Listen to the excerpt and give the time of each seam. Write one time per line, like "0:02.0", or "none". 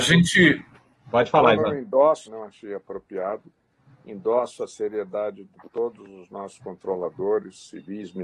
0:00.9
0:02.3

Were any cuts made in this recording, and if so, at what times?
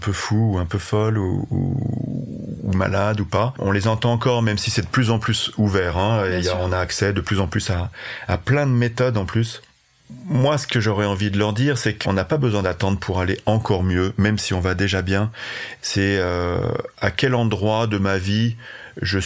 0:12.0
0:15.8

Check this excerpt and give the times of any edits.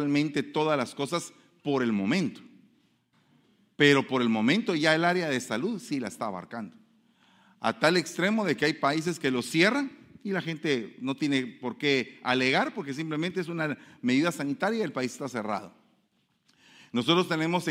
none

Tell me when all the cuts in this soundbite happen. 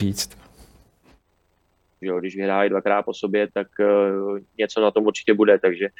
0:02.0
0:03.5

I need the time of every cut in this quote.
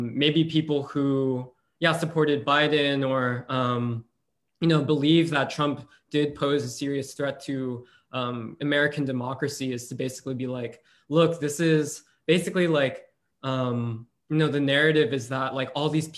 none

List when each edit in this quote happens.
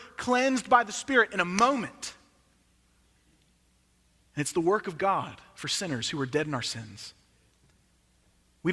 none

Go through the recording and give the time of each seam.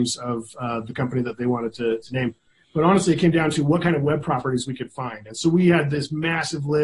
none

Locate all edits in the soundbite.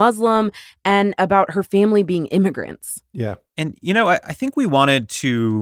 none

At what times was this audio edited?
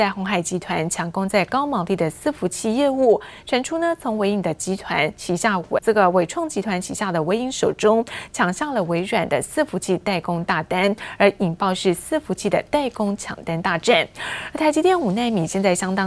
0:05.8

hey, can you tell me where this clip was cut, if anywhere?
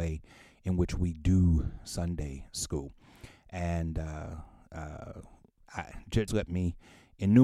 0:06.3

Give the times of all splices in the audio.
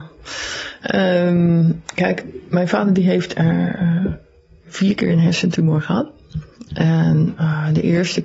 none

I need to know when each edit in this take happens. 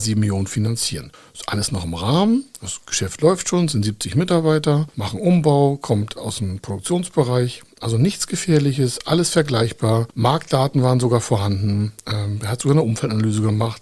none

